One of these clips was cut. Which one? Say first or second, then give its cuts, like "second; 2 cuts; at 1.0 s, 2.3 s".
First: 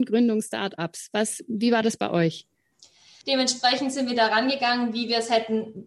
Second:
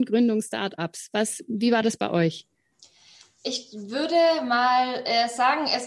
first; 1 cut; at 3.2 s